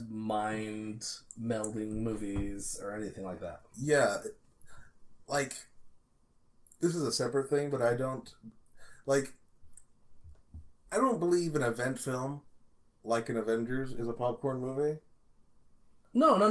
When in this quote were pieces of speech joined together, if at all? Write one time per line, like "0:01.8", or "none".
none